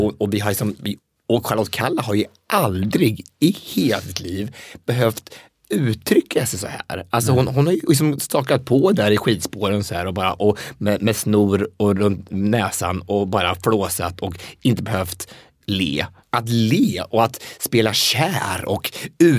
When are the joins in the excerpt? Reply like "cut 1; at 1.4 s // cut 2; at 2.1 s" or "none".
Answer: cut 1; at 16.2 s